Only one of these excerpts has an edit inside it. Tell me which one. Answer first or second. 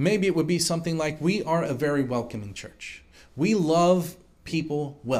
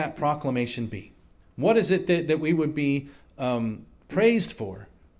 second